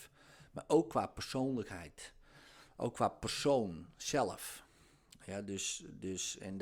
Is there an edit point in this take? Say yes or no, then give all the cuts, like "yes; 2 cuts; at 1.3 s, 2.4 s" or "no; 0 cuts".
no; 0 cuts